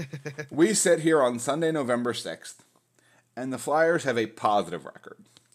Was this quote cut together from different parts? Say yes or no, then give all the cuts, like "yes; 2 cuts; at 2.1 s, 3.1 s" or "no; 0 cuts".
no; 0 cuts